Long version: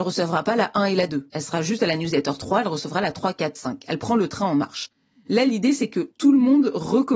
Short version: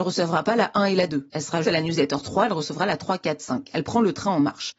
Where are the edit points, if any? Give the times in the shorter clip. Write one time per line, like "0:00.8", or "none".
0:01.6